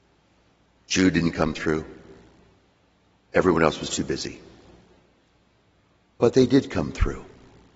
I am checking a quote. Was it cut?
no; 0 cuts

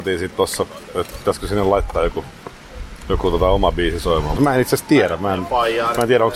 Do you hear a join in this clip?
yes; 1 cut; at 4.4 s

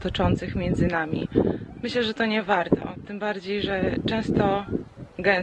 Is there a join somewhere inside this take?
no; 0 cuts

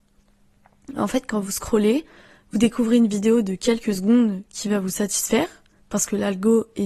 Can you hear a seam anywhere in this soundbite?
no; 0 cuts

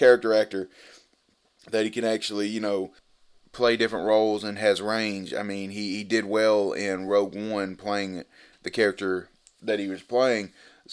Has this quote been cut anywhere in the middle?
no; 0 cuts

